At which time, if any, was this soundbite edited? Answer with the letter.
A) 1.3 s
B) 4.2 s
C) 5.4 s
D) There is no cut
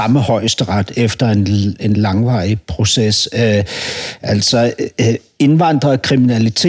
D